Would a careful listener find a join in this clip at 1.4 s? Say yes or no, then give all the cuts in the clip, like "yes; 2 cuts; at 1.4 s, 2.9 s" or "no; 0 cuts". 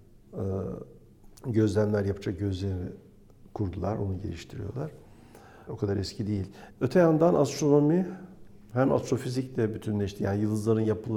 yes; 3 cuts; at 1.4 s, 5.7 s, 6.7 s